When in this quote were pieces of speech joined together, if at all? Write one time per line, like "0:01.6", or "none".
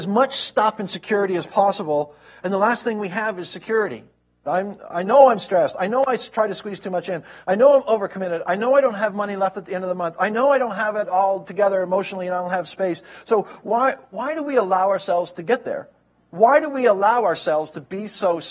0:04.5